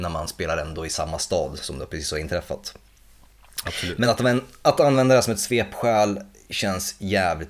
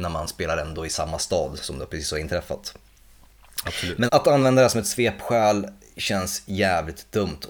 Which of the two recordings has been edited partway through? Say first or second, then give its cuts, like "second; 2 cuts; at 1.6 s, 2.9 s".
second; 1 cut; at 4.1 s